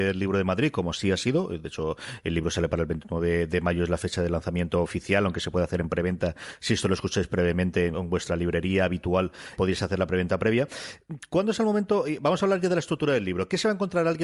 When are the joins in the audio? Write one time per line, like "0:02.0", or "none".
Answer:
0:07.9
0:09.6